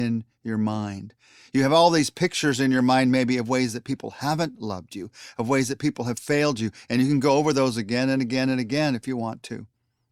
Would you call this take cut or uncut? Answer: uncut